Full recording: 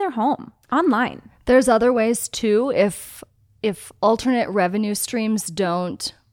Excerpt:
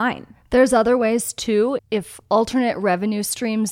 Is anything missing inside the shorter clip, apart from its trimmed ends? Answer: yes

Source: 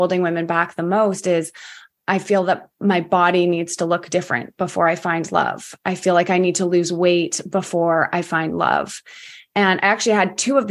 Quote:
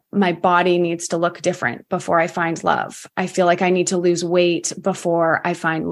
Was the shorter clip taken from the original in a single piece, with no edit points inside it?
yes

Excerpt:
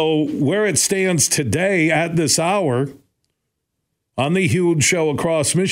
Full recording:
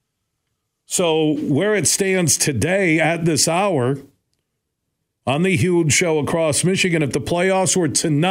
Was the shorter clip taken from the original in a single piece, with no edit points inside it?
yes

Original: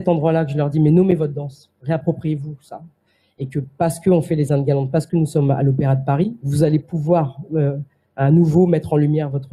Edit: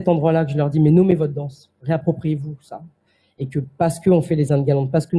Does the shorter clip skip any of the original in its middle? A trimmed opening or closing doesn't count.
no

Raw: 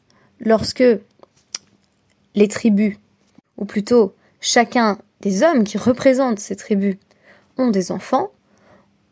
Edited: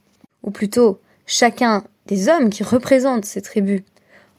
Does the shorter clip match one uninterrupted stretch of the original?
yes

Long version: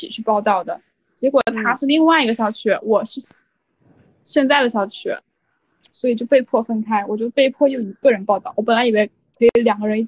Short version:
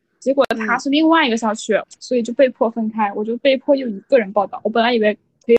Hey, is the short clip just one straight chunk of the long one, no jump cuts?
no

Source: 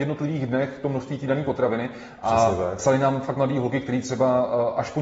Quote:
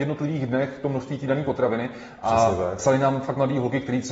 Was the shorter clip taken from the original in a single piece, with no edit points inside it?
yes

